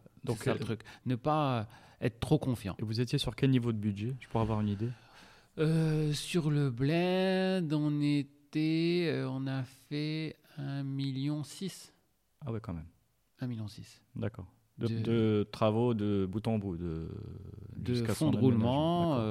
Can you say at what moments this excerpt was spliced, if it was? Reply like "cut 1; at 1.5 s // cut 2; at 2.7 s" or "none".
none